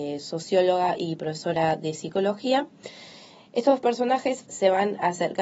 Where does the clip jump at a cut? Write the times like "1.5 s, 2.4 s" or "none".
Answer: 4.4 s